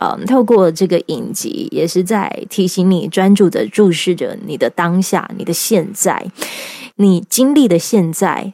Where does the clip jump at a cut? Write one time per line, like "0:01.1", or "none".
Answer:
none

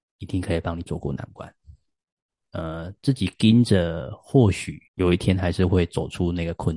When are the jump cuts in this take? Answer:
0:02.4
0:04.9

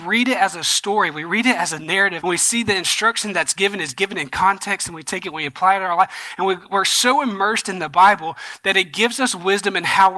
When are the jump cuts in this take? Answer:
0:02.2

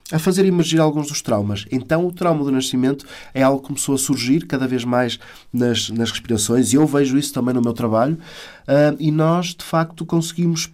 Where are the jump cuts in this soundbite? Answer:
none

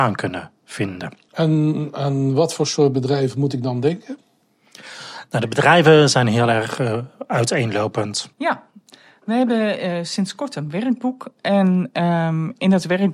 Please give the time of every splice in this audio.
0:01.3
0:08.3

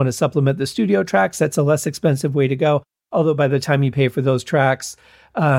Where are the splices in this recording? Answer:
none

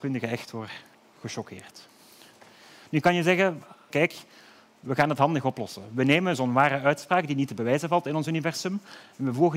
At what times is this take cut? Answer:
0:01.1
0:03.9

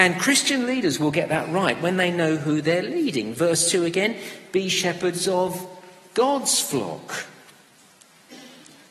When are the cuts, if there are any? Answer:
none

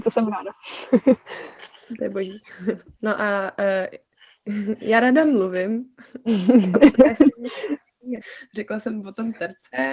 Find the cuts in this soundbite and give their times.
0:03.0
0:08.2

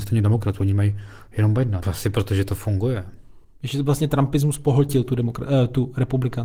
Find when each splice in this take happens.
0:01.8

